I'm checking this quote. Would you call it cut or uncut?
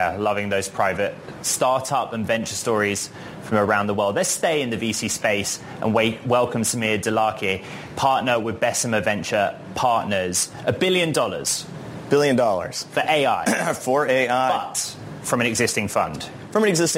uncut